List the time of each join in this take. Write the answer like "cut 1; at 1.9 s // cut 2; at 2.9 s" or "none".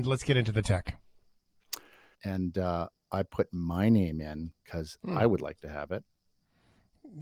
cut 1; at 2.1 s